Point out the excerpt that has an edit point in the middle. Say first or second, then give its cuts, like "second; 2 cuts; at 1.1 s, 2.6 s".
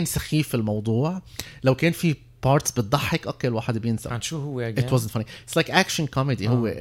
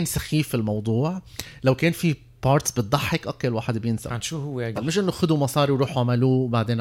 second; 1 cut; at 4.7 s